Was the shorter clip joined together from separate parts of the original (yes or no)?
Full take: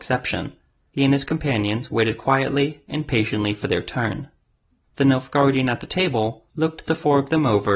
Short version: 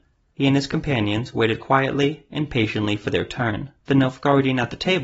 yes